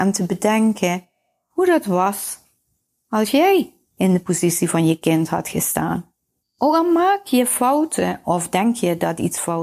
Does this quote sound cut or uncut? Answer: cut